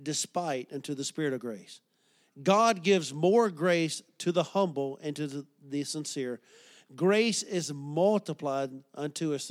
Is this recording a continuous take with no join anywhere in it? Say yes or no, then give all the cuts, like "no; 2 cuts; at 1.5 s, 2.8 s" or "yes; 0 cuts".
yes; 0 cuts